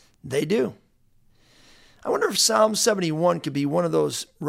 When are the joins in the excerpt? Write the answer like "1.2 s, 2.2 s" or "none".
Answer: none